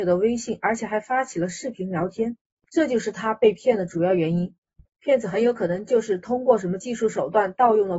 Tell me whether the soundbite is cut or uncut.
uncut